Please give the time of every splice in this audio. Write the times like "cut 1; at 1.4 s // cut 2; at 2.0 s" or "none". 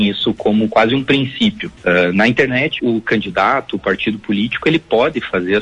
cut 1; at 1.8 s // cut 2; at 2.8 s